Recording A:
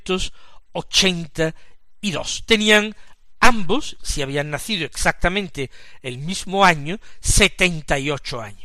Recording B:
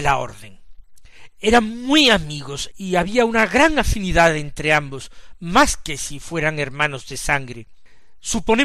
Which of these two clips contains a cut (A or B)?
B